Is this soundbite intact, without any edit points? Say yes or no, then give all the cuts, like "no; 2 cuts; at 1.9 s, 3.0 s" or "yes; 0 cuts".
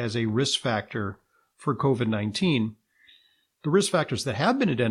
yes; 0 cuts